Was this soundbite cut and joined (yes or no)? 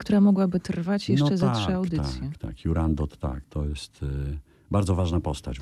yes